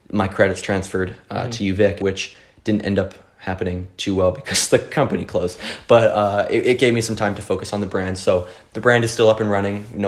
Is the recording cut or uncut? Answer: cut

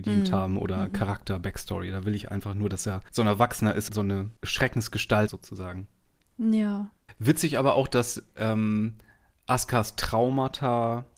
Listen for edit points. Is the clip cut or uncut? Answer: cut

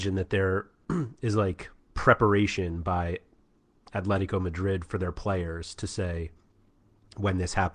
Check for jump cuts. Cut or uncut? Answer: uncut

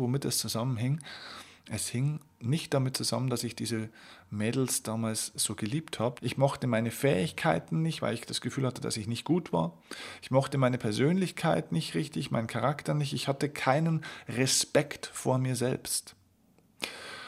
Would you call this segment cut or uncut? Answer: cut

